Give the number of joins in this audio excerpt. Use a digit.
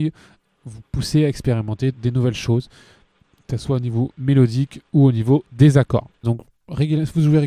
2